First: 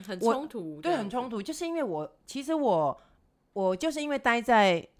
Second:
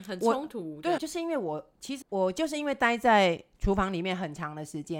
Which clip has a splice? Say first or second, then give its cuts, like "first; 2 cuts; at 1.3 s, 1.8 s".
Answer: second; 2 cuts; at 1.0 s, 2.0 s